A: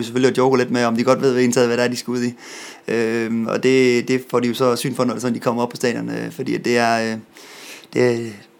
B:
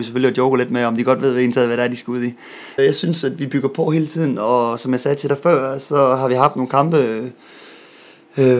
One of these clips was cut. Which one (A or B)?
B